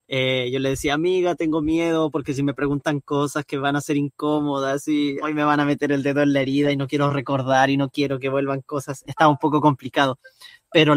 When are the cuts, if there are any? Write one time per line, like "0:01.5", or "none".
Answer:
0:05.2
0:09.0